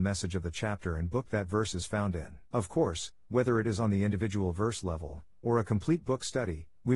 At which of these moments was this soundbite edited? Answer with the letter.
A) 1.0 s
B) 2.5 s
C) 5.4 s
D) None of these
B